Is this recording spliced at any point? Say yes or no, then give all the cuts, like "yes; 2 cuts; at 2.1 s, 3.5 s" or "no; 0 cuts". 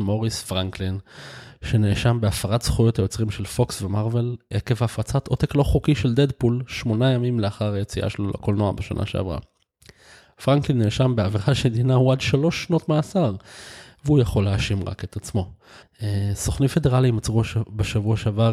yes; 2 cuts; at 4.5 s, 15.8 s